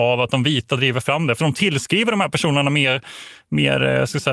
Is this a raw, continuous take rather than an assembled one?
no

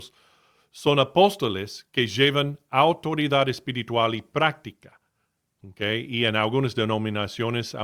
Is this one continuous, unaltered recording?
yes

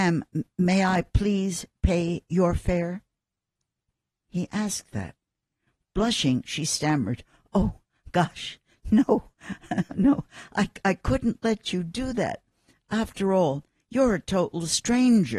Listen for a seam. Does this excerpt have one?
no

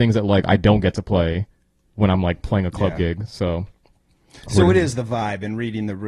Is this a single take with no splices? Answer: yes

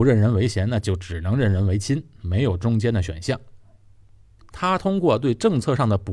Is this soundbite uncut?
no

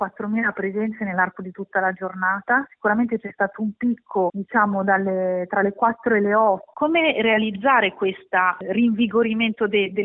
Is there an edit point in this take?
yes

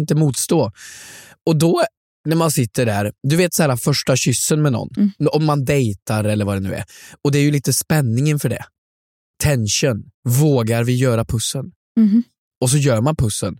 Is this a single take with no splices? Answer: yes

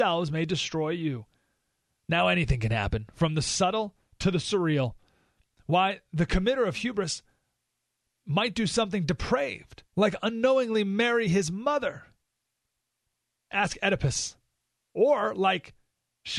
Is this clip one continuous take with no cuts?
no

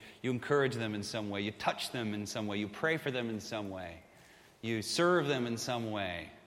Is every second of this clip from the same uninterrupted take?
yes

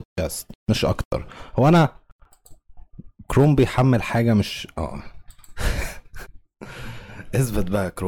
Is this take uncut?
no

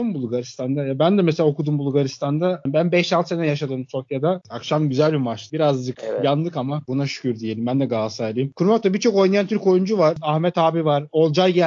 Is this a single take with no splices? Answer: no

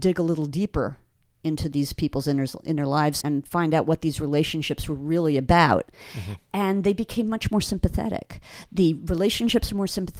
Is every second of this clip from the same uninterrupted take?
no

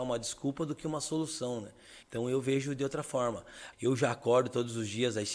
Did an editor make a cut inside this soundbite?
yes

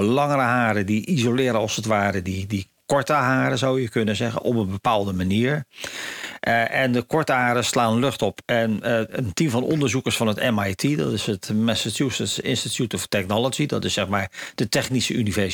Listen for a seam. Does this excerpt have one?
no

